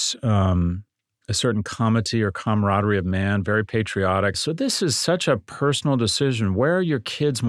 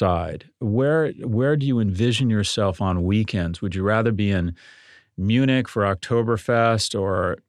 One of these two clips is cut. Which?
first; 1 cut; at 4.3 s

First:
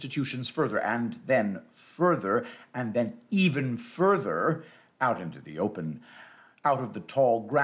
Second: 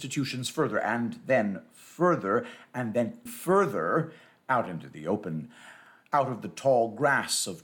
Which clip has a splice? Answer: second; 1 cut; at 3.3 s

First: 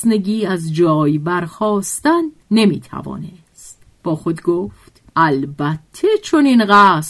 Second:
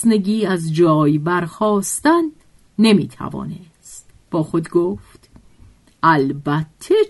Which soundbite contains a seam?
first; 2 cuts; at 2.4 s, 5.1 s

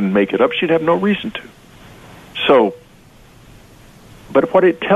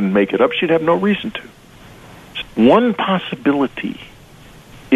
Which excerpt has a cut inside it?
second; 1 cut; at 2.4 s

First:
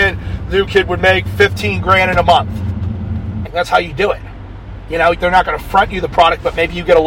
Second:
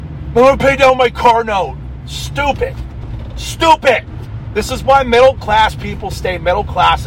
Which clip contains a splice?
first; 2 cuts; at 3.4 s, 5.1 s

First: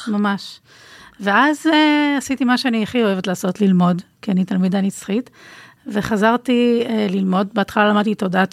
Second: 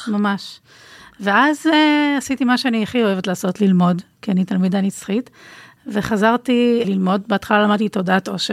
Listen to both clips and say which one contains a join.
second; 1 cut; at 6.8 s

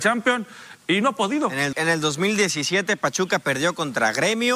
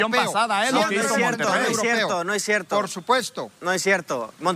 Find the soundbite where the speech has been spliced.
first; 1 cut; at 1.7 s

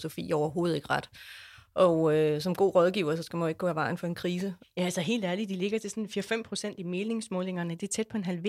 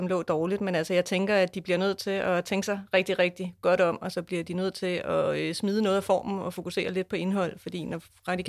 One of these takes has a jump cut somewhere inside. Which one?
first; 1 cut; at 4.6 s

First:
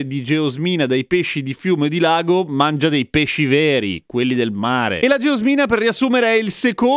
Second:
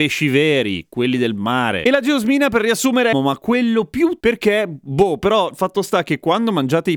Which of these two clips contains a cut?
second; 2 cuts; at 3.1 s, 4.2 s

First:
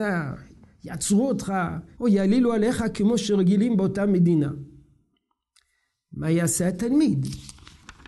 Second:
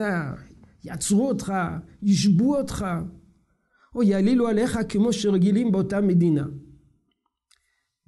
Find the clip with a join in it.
first; 1 cut; at 2.0 s

